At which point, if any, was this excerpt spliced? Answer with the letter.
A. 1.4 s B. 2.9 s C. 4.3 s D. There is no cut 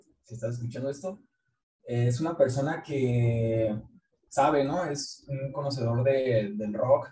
C